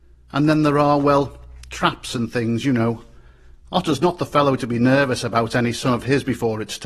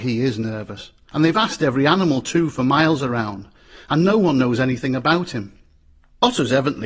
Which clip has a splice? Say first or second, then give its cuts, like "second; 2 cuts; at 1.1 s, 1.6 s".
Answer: second; 1 cut; at 1.1 s